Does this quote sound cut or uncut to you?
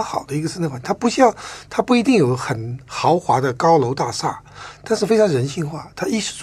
uncut